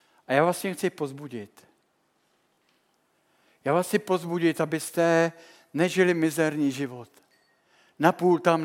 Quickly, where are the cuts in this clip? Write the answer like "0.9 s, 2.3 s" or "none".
none